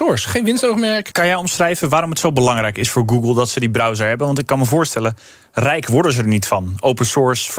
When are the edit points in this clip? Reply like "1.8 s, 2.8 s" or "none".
1.1 s

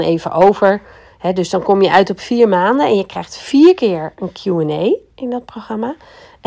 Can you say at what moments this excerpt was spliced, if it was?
none

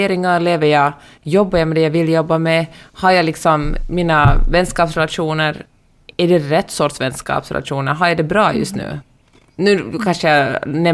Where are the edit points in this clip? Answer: none

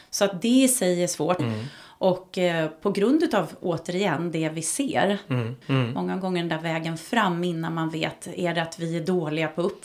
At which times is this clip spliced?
1.4 s, 5.6 s

